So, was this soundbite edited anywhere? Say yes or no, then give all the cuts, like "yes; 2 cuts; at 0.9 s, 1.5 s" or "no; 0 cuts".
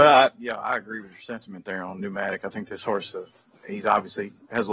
no; 0 cuts